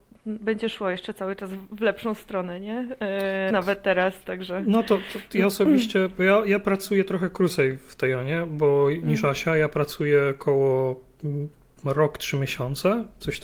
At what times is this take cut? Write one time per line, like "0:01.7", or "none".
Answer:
0:03.5